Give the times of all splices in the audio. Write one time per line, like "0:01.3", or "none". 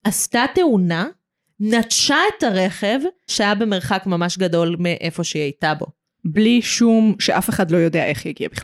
0:03.3